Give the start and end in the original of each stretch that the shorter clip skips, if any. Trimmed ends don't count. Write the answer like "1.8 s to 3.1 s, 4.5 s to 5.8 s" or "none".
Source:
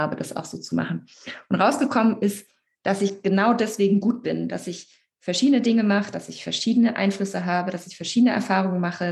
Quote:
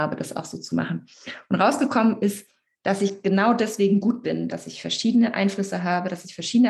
4.5 s to 6.1 s